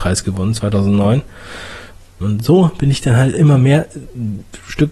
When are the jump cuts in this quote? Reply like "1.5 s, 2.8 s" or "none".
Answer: 2.2 s